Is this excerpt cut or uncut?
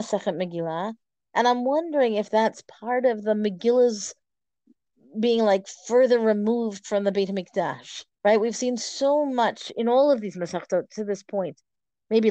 cut